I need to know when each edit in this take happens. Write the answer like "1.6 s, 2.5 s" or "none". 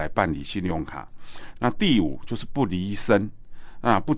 1.6 s